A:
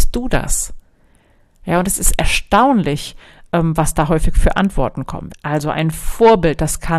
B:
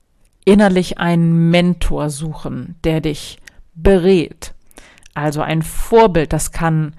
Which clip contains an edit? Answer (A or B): A